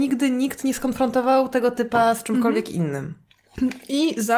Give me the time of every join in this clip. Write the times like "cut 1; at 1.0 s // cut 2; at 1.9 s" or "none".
none